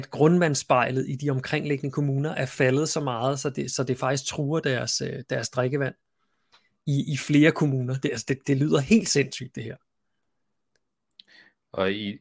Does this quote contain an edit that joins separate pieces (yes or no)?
no